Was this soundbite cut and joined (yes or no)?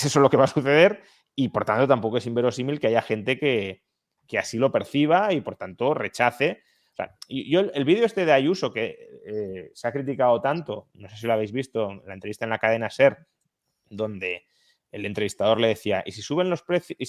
no